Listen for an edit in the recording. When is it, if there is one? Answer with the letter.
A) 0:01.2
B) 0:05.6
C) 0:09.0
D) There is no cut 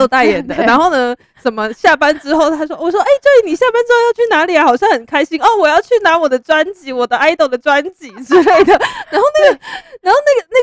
D